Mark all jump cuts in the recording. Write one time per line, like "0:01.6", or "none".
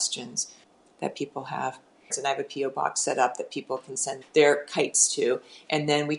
0:02.1
0:04.2